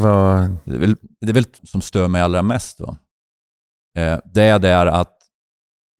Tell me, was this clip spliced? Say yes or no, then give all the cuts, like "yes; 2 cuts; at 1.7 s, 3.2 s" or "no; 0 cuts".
yes; 1 cut; at 1.6 s